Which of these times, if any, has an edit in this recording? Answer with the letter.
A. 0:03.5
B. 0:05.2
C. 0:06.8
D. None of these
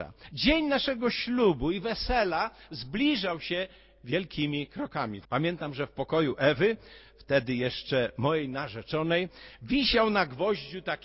B